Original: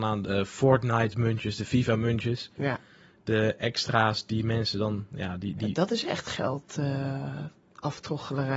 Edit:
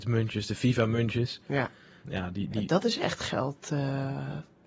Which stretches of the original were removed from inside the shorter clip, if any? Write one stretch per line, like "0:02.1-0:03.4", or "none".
0:03.1-0:05.1